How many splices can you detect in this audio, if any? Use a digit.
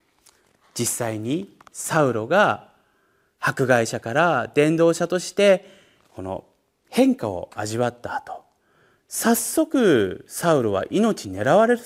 0